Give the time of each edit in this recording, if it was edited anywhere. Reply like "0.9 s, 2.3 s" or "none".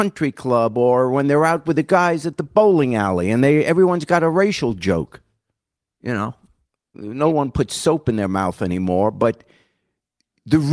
5.9 s